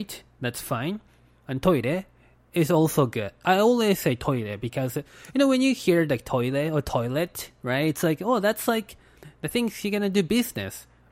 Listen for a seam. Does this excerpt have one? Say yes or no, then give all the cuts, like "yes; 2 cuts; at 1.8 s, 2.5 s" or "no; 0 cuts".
no; 0 cuts